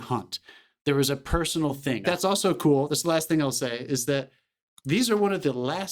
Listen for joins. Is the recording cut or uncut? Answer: cut